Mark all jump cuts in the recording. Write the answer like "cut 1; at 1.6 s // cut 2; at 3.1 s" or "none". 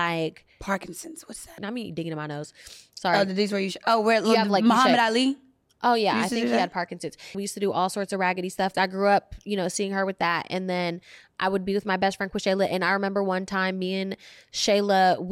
cut 1; at 1.6 s // cut 2; at 7.3 s // cut 3; at 8.7 s